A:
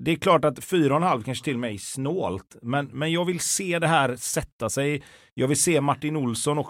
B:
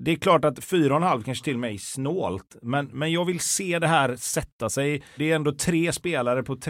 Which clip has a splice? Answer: B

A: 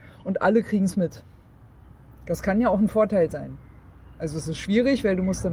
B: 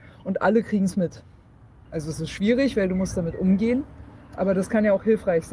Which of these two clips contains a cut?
B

